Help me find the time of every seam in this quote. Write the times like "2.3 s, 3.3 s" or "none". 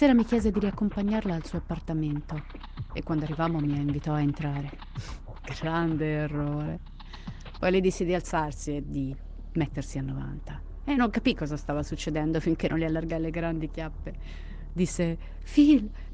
7.6 s